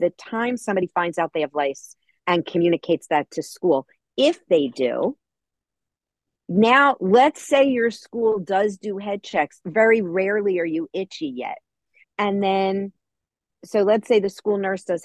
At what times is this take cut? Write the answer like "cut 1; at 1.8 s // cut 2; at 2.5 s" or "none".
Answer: cut 1; at 9.6 s // cut 2; at 12.0 s

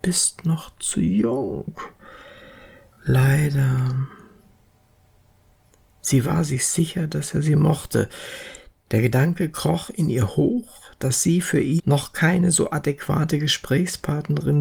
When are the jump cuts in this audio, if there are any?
none

